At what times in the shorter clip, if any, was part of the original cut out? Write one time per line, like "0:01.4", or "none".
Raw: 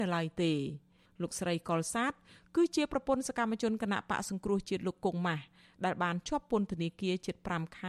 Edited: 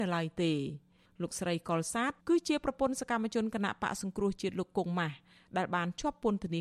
0:02.2